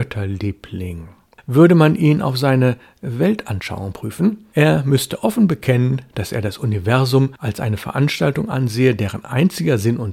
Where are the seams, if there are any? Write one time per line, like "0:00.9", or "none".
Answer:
none

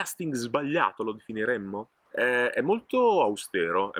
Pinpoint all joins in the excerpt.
0:02.0

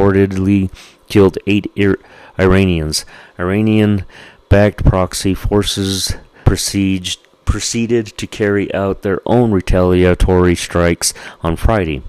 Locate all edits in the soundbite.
0:06.4

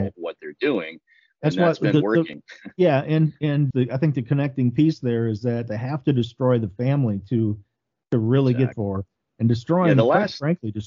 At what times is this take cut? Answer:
0:03.7
0:08.7

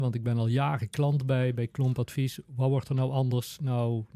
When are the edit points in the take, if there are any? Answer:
0:01.6

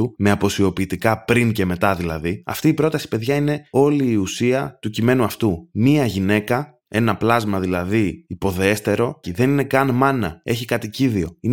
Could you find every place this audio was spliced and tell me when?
0:09.2
0:10.4

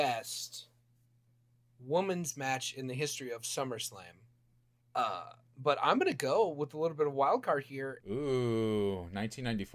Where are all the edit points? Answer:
0:04.8
0:08.0

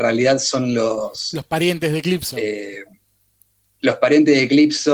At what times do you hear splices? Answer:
none

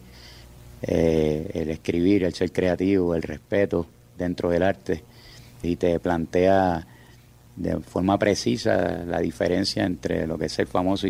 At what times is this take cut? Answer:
0:05.6
0:07.5

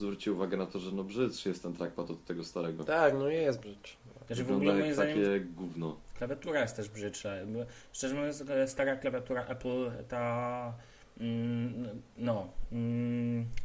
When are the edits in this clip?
none

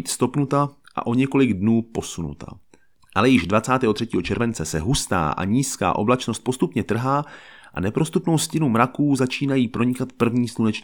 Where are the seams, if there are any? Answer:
none

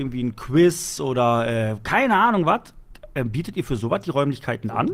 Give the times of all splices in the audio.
none

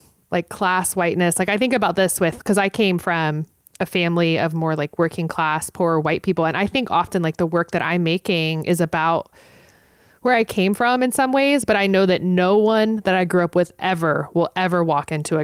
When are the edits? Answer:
none

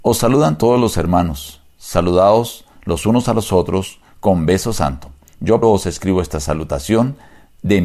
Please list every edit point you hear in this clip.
0:05.6

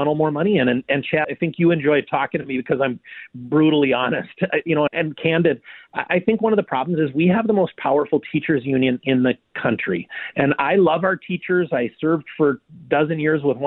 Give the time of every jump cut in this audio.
0:01.2
0:04.9

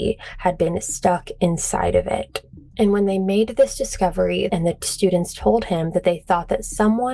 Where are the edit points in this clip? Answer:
0:02.7
0:04.5

